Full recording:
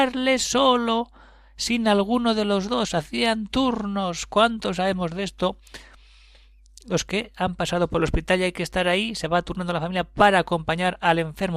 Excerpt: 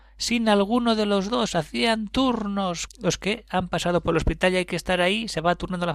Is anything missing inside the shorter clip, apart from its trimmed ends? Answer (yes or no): yes